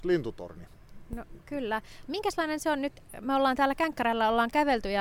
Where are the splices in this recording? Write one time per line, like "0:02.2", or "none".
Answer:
none